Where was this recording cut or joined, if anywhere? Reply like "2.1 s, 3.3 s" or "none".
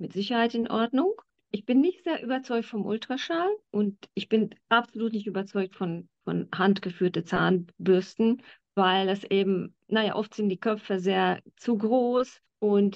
none